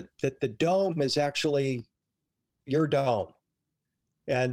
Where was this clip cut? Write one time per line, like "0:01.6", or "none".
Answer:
none